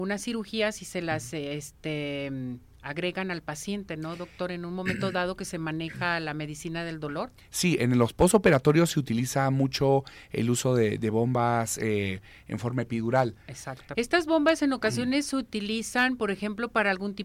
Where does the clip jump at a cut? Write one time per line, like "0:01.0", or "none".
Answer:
0:14.0